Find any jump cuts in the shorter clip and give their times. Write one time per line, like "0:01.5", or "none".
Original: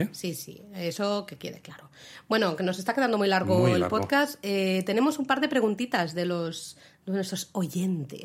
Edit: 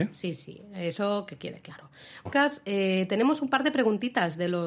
0:02.3